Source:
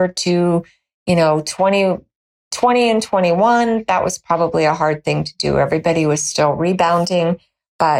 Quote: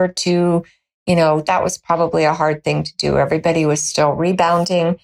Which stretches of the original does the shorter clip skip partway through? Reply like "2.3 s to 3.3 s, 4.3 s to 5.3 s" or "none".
1.4 s to 3.8 s

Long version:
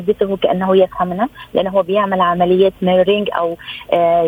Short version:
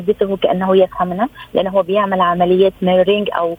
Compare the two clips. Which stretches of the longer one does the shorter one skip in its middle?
none

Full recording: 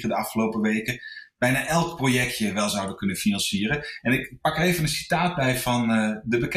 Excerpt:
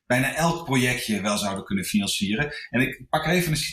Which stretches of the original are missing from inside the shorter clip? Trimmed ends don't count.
none

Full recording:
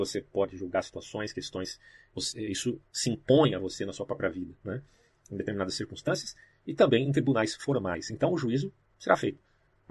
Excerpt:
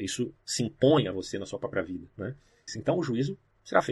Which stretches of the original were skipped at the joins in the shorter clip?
5.1 s to 8.0 s

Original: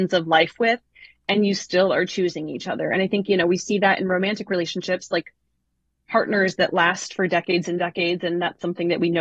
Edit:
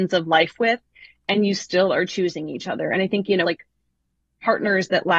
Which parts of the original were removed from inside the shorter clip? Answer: 3.4 s to 5.1 s

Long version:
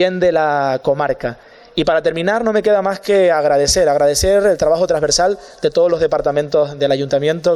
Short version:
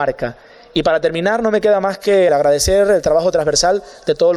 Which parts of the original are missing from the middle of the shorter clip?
3.3 s to 3.8 s

